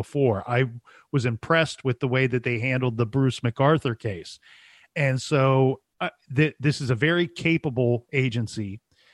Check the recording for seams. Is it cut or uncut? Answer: uncut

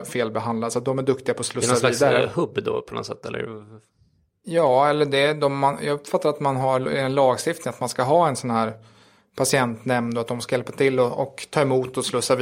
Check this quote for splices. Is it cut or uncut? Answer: uncut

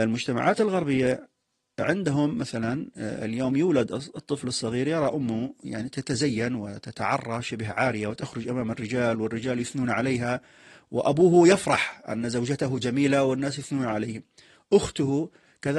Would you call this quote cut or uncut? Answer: uncut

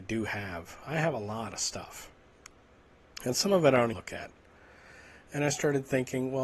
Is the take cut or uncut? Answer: cut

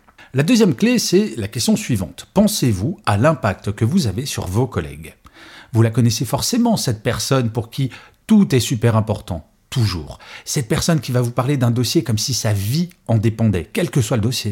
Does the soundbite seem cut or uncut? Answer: uncut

